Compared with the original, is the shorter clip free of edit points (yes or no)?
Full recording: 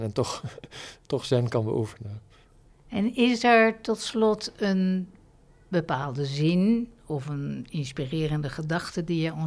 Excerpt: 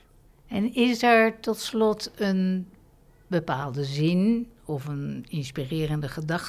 yes